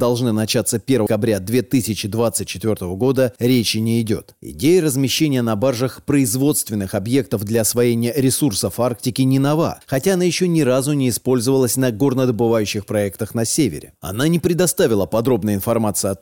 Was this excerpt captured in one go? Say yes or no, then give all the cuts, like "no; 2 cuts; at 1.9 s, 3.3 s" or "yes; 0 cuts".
no; 2 cuts; at 1.1 s, 14.0 s